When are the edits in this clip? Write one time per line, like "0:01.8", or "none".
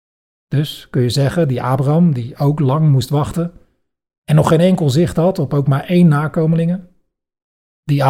none